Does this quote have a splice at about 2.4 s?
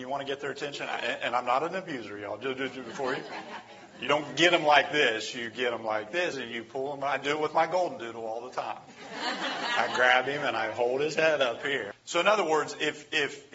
no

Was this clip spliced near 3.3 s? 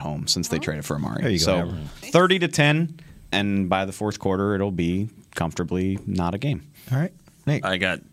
yes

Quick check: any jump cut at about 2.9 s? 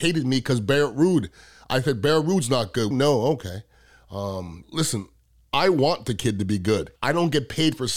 yes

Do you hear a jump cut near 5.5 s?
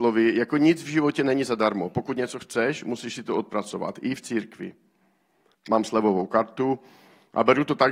yes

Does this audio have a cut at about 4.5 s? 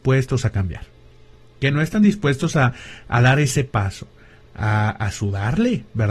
yes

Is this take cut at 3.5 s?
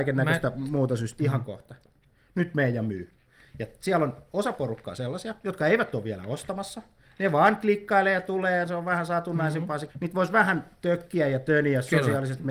no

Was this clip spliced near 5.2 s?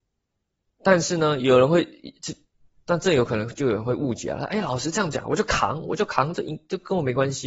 yes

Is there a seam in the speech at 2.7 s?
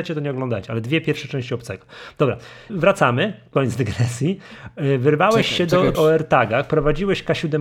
yes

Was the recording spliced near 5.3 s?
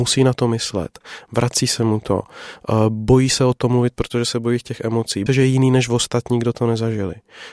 yes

